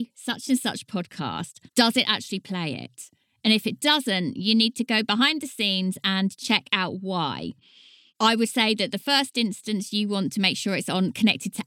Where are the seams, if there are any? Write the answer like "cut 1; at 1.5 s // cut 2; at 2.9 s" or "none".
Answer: cut 1; at 1.7 s

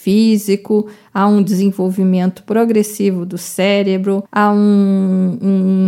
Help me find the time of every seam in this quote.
none

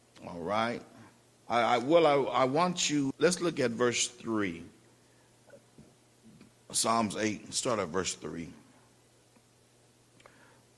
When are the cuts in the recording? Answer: cut 1; at 1.4 s // cut 2; at 3.1 s

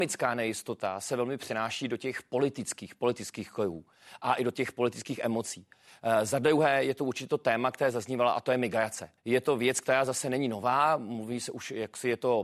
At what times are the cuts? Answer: cut 1; at 9.2 s

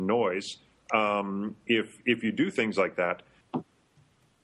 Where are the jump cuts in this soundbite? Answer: cut 1; at 3.4 s

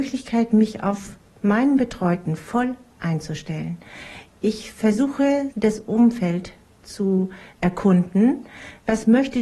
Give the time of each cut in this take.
cut 1; at 5.5 s

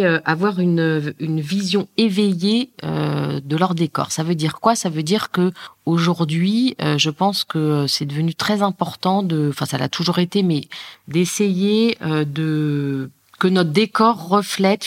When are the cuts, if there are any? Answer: none

